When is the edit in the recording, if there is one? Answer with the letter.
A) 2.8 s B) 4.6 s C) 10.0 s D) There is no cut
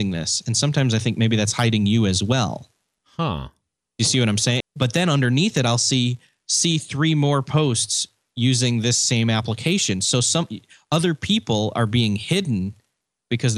B